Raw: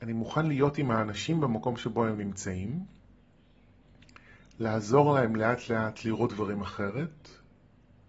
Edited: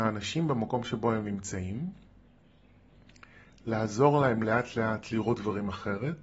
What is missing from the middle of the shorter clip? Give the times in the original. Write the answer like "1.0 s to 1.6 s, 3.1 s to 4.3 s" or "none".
none